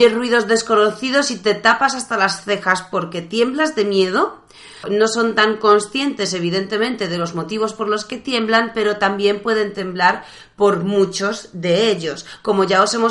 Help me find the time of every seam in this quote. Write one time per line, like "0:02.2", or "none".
0:04.8